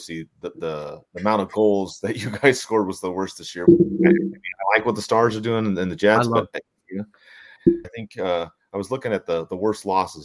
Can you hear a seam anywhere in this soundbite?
yes; 2 cuts; at 3.7 s, 7.8 s

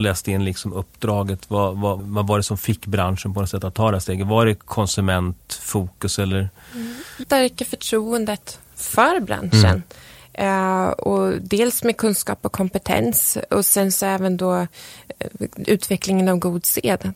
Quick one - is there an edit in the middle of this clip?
yes; 2 cuts; at 2.0 s, 7.2 s

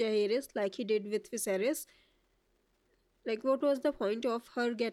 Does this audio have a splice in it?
no; 0 cuts

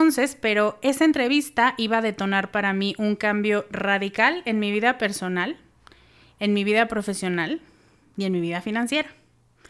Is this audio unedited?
yes; 0 cuts

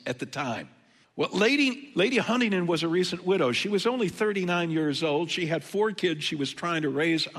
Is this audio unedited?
no; 1 cut; at 1.0 s

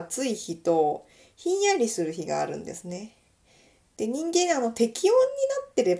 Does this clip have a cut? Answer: no; 0 cuts

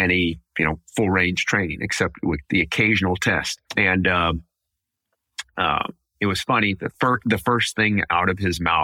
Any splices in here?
yes; 1 cut; at 3.7 s

